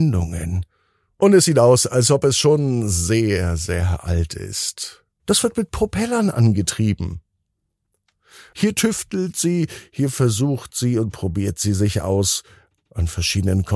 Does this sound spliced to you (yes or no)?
yes